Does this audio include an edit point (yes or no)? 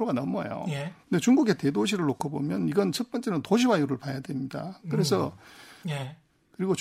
yes